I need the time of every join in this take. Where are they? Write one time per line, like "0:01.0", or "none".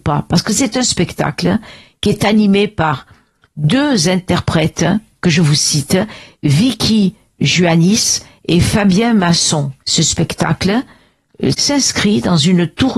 0:09.8
0:11.5